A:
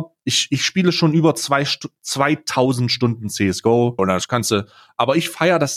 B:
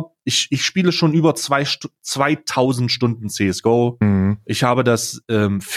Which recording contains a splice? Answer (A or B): A